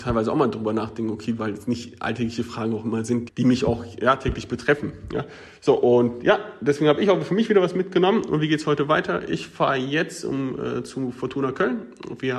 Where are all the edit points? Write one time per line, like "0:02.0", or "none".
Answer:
0:01.4
0:03.3